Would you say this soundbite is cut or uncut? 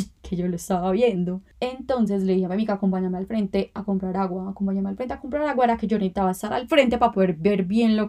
uncut